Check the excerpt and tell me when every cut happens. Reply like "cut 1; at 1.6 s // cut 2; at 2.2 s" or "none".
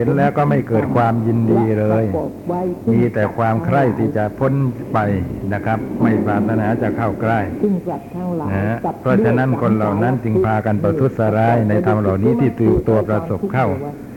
cut 1; at 13.0 s